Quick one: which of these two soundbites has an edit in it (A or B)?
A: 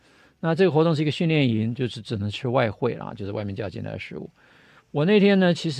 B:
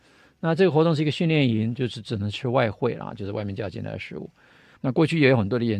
B